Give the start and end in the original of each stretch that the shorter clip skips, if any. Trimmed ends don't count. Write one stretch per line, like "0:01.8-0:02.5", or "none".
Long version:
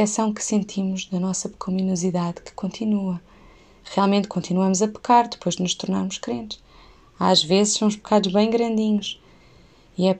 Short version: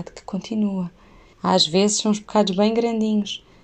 0:03.6-0:07.1